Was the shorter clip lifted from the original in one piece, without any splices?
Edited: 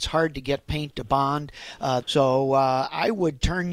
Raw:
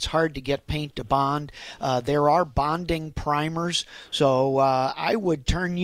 no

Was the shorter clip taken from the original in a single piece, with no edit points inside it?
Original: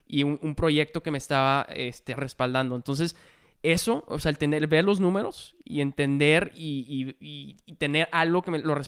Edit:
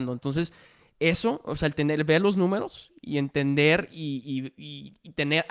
yes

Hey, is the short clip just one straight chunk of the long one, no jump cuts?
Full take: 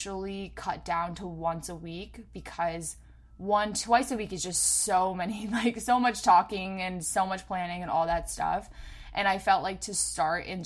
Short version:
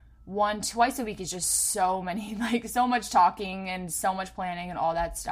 yes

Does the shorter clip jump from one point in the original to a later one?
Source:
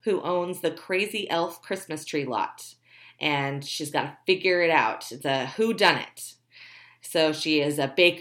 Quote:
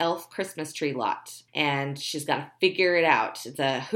yes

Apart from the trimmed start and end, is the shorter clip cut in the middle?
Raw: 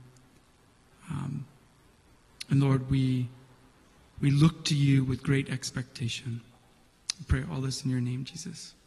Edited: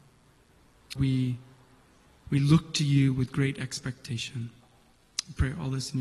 yes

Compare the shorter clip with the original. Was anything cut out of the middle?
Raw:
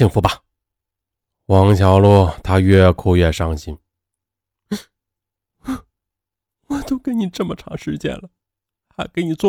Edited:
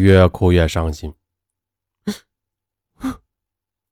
no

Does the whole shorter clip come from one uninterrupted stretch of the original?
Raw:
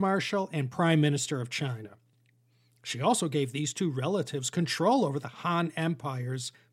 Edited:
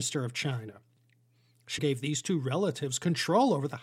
no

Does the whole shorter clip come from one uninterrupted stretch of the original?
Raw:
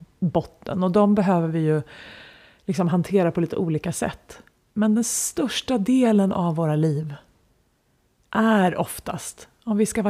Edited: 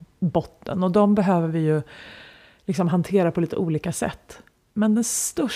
yes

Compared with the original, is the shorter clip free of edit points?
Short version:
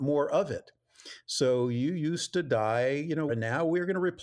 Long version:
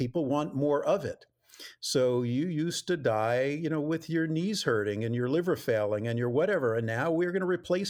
no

